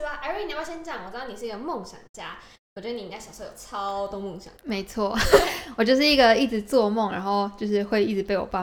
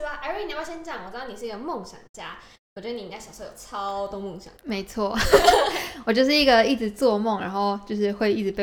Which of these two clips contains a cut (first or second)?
first